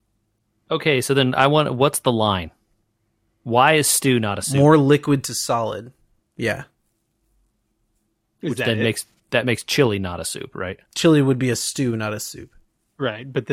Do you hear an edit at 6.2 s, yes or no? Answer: yes